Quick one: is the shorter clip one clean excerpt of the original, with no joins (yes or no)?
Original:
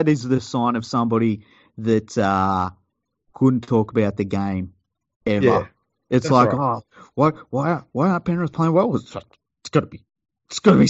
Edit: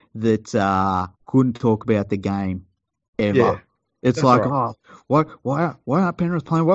no